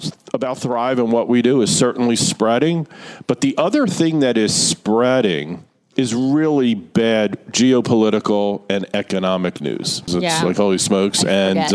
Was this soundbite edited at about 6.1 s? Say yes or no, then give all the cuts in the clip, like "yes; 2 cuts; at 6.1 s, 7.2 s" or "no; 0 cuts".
no; 1 cut; at 10.1 s